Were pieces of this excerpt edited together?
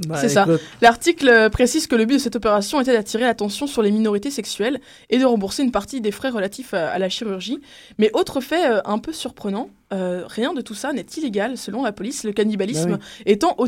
no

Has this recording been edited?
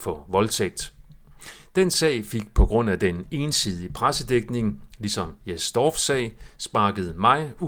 no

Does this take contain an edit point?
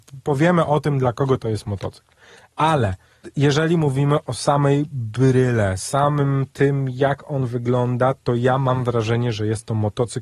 no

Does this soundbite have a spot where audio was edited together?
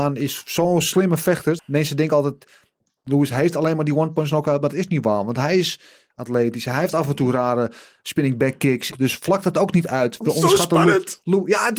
yes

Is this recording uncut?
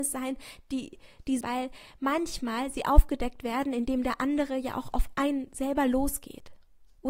no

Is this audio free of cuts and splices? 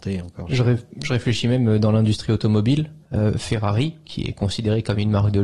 no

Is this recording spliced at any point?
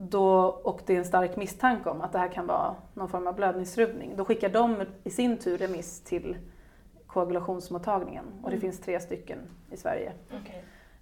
no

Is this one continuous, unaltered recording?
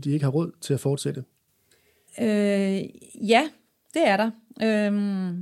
yes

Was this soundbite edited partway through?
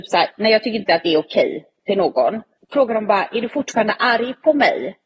yes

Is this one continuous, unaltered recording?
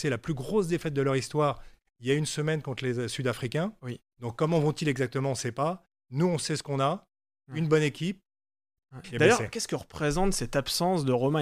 no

